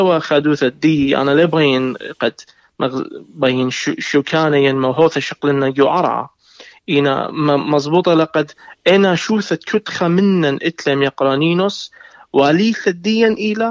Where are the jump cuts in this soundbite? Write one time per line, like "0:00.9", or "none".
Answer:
none